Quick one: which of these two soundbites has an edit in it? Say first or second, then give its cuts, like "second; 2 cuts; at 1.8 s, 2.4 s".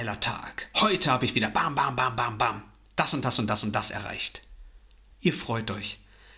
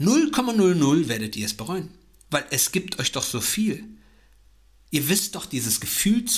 first; 1 cut; at 5.1 s